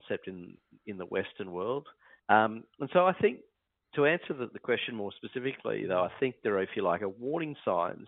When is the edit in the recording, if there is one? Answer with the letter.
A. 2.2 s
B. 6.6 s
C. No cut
A